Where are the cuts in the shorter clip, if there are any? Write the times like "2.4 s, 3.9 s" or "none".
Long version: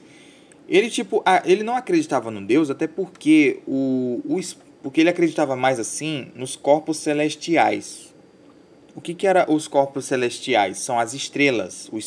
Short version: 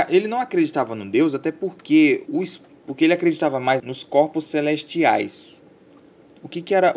2.3 s, 3.8 s